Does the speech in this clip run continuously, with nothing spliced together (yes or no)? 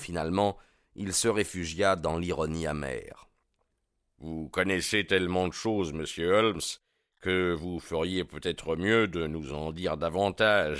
yes